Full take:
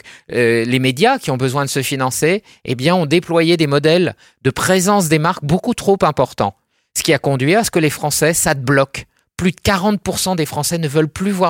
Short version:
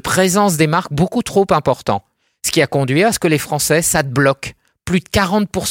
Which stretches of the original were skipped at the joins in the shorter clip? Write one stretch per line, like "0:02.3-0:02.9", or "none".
none